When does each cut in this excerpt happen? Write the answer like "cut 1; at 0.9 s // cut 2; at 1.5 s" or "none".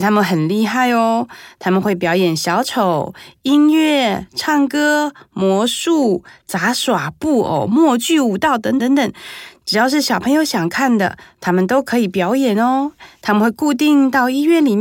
cut 1; at 8.8 s // cut 2; at 13.2 s